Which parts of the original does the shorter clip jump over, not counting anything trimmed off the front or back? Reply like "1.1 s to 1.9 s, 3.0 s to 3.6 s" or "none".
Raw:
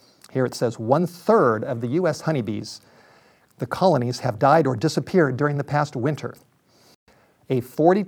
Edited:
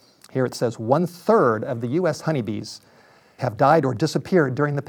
3.4 s to 4.2 s